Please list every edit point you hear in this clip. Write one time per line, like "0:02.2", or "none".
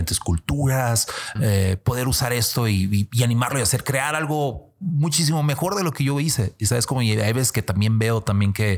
0:01.4